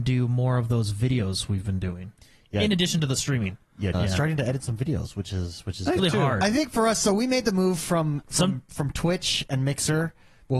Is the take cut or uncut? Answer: cut